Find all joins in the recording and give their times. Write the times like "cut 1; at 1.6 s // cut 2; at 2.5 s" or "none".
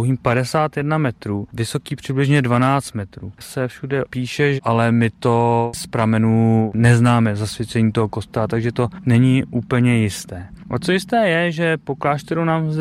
cut 1; at 4.6 s

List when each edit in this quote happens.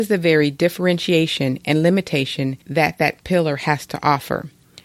cut 1; at 2.6 s

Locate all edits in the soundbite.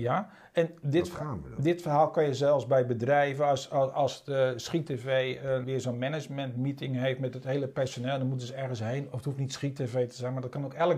cut 1; at 5.6 s

